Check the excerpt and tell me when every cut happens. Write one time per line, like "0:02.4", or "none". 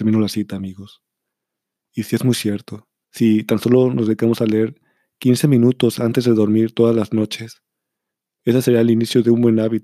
0:03.0